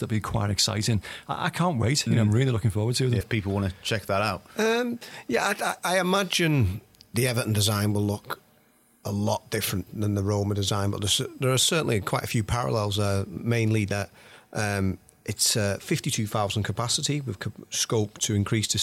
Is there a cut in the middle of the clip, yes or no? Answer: yes